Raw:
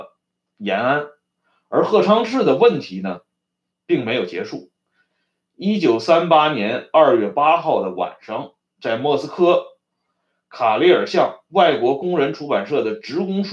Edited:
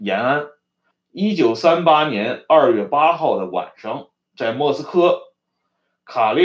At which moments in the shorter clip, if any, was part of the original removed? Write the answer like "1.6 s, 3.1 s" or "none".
0.9 s